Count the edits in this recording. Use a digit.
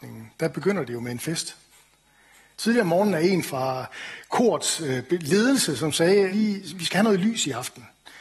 2